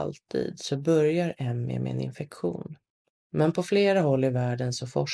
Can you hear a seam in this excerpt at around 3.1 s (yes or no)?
yes